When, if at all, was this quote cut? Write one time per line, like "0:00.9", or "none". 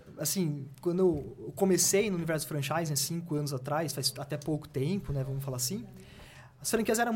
none

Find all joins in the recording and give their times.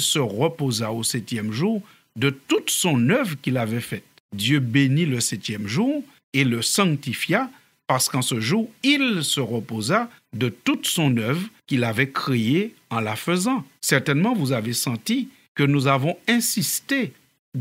0:13.8

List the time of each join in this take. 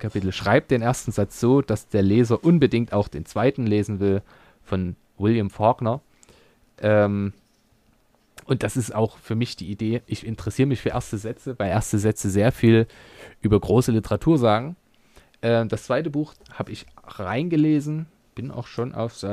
0:16.3

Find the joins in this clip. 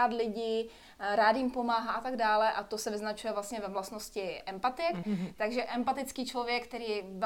0:05.0

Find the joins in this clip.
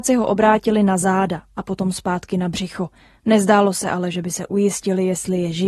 none

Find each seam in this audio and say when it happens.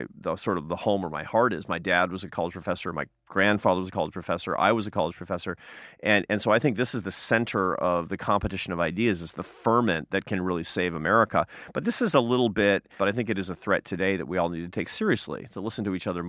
0:13.0

